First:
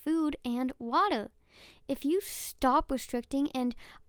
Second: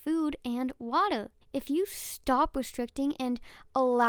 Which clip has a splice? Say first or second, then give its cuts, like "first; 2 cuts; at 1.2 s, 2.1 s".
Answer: second; 1 cut; at 1.4 s